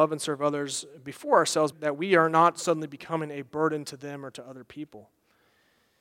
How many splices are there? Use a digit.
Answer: 1